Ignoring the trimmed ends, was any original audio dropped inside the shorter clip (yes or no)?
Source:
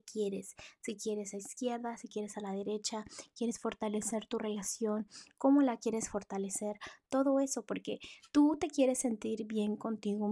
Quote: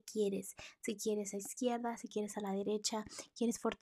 no